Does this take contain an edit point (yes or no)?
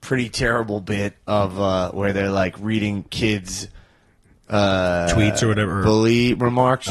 no